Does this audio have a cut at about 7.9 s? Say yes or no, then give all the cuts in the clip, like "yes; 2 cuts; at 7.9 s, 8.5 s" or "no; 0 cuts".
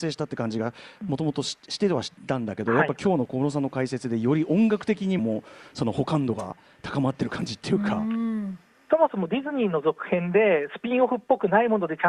no; 1 cut; at 5.2 s